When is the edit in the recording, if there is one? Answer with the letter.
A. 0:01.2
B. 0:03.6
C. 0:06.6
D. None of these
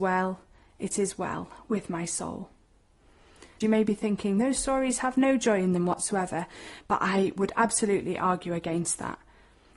B